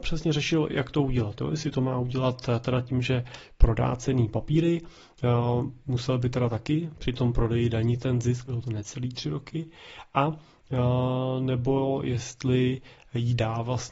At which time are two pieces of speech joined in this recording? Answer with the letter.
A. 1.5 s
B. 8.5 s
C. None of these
B